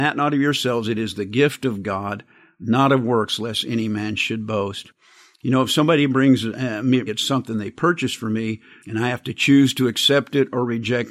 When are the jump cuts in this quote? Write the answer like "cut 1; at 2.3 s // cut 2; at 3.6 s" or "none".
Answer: cut 1; at 7.1 s // cut 2; at 8.8 s

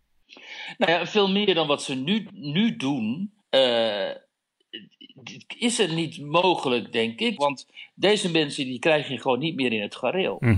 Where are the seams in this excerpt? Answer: cut 1; at 3.4 s // cut 2; at 7.4 s

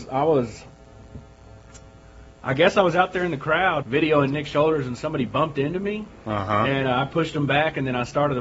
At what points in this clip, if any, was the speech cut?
cut 1; at 3.8 s

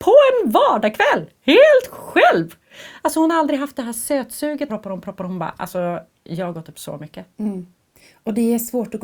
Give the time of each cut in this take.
cut 1; at 4.7 s

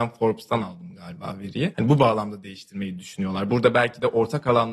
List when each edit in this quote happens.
none

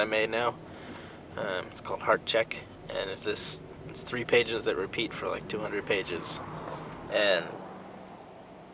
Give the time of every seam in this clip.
cut 1; at 3.2 s // cut 2; at 7.1 s

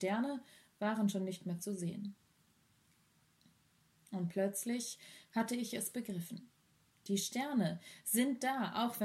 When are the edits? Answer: none

